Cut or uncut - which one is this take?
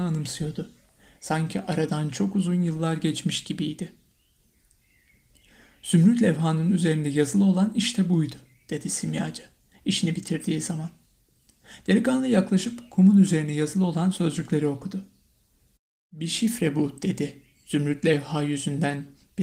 uncut